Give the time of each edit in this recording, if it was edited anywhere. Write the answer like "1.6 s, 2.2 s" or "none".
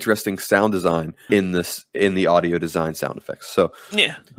1.3 s

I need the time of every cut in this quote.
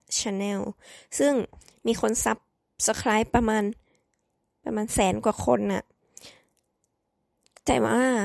none

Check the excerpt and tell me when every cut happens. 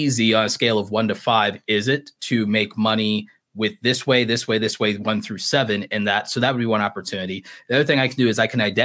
none

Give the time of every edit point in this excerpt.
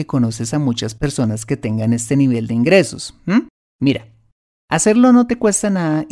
3.7 s

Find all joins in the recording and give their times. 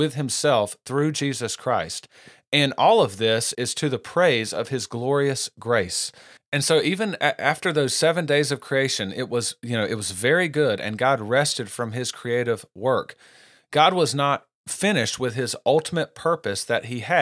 3.5 s

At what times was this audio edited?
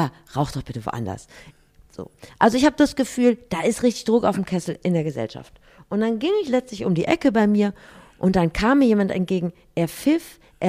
none

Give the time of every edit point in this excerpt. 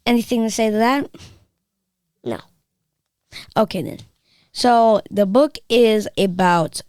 none

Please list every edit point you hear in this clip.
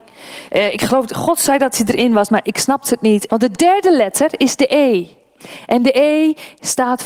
3.3 s

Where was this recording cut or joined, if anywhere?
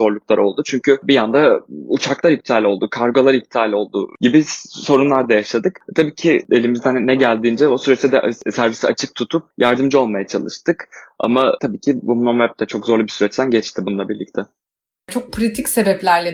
none

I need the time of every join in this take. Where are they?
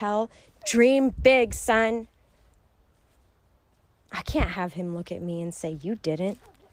none

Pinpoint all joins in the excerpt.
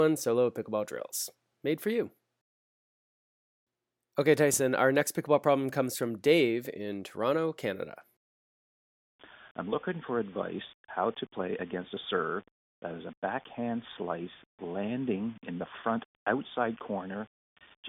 none

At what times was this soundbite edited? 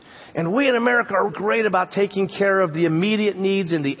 1.3 s

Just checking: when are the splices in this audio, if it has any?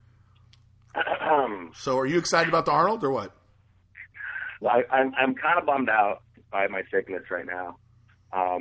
1.7 s, 4.6 s

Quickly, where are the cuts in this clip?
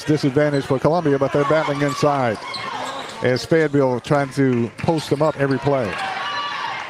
5.3 s

